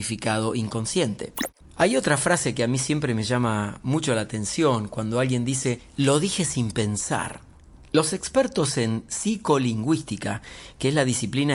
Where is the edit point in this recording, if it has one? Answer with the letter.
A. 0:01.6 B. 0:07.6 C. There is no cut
A